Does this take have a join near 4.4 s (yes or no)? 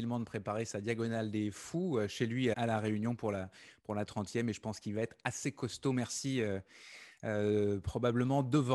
no